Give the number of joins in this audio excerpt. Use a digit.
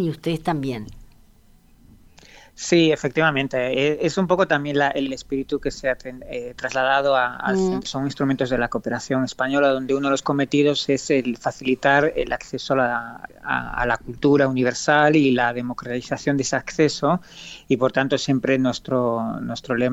2